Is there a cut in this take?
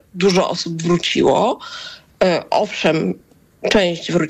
no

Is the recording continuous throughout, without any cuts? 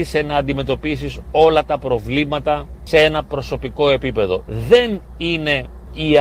no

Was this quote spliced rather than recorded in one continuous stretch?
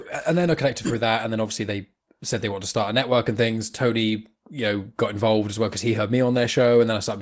no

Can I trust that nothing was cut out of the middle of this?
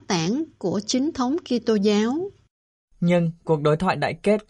yes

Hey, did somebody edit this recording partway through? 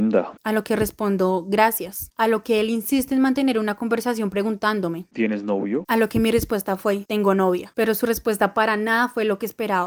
yes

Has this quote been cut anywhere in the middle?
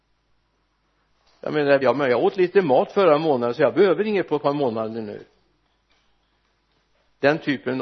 yes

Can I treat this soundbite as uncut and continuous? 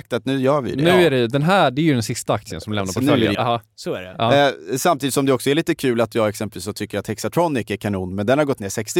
no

